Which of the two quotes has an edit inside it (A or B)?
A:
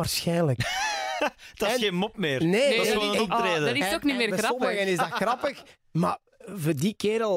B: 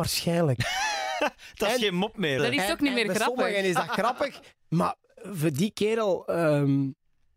B